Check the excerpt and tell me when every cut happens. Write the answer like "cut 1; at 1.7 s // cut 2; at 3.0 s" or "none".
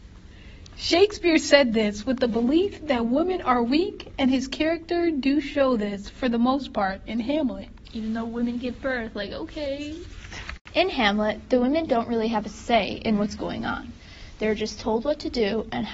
none